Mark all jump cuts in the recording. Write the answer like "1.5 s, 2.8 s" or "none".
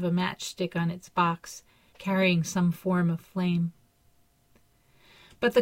1.9 s